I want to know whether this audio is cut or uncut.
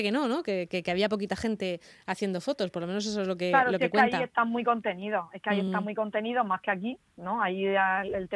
uncut